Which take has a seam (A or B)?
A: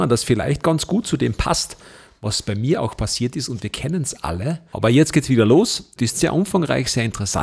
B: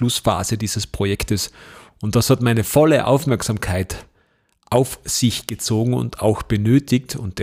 A